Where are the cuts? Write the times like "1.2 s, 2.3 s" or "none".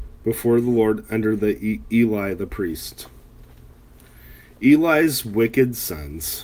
none